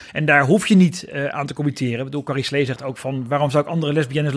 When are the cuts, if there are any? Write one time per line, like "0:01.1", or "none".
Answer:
none